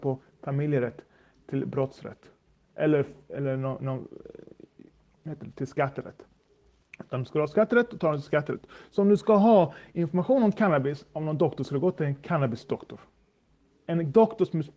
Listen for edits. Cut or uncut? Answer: uncut